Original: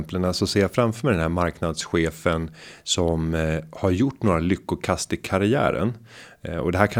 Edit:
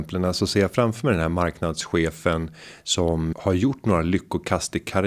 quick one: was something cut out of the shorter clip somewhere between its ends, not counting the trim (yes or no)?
yes